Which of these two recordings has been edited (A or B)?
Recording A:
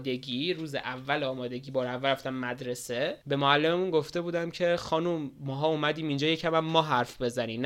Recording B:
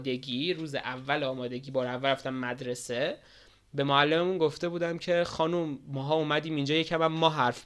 A